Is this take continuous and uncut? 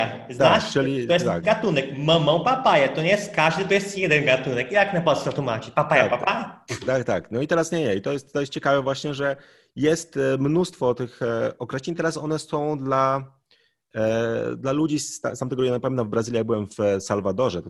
yes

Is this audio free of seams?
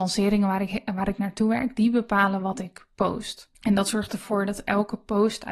no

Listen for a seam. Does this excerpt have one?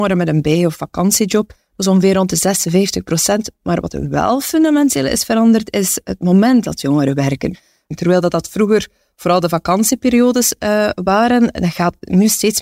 no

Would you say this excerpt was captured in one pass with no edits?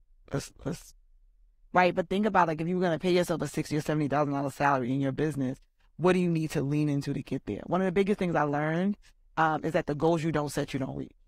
yes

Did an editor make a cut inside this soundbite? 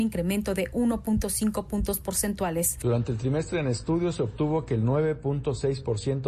no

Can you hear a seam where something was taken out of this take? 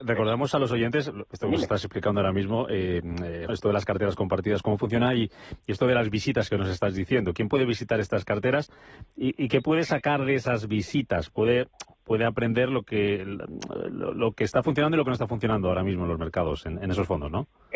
yes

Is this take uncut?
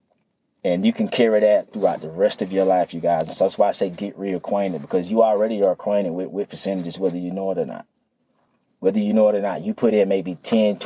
yes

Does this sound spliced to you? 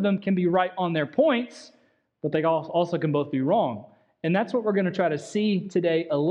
no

